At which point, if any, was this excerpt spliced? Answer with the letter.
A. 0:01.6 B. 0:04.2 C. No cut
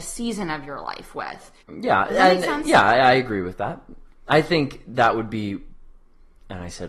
A